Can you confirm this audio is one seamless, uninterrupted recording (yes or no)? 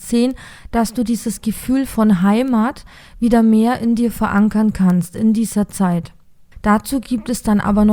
no